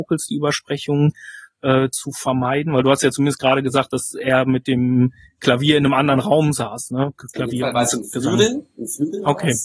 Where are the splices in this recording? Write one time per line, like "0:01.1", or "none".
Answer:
none